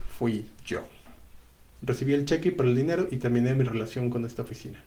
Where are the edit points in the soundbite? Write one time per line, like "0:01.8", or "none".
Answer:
0:01.7